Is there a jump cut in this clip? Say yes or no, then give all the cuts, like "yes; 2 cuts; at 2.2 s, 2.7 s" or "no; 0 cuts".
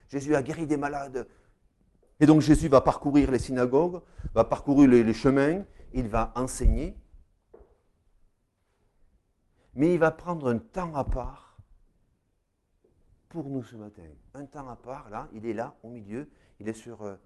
yes; 1 cut; at 2.2 s